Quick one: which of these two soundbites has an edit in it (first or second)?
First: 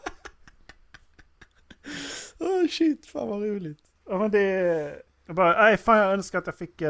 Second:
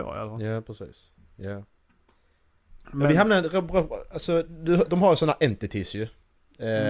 first